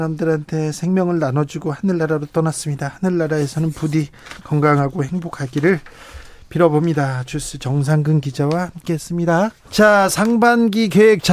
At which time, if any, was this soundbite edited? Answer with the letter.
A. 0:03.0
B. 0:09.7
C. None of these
B